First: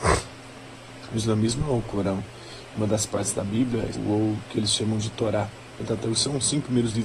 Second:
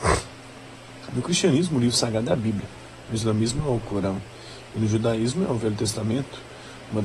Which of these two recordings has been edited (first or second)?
first